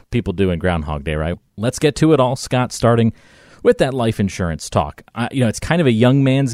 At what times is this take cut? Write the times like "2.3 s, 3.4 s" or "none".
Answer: 1.3 s